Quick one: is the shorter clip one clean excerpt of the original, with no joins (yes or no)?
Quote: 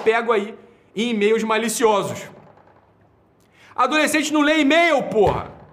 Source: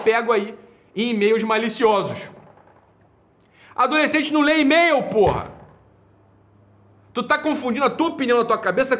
yes